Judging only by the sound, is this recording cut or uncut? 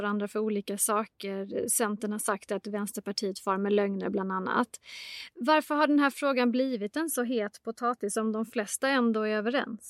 uncut